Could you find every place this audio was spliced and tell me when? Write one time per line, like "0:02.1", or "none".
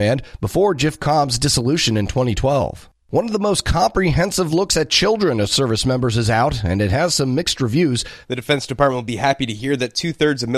0:03.0
0:08.2